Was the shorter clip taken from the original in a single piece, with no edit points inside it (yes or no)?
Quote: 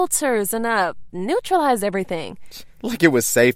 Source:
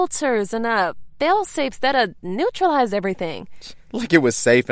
no